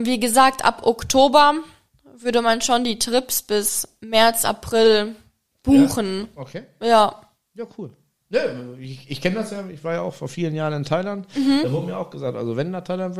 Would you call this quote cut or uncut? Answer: uncut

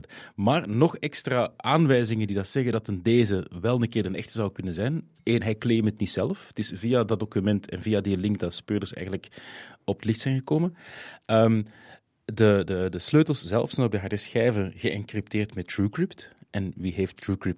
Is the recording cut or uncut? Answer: uncut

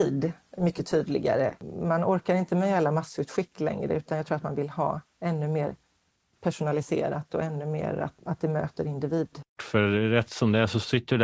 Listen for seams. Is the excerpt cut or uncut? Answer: cut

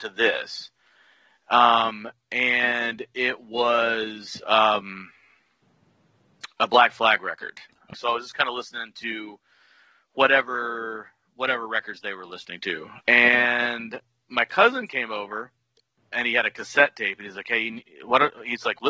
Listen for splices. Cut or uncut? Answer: cut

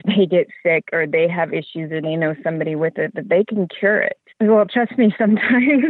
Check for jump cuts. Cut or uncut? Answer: cut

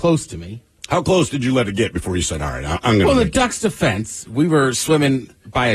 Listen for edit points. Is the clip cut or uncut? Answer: uncut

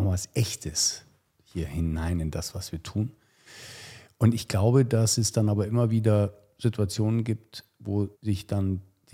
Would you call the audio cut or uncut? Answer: cut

